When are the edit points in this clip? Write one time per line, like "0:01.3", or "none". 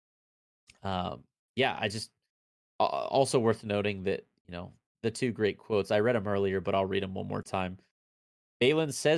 none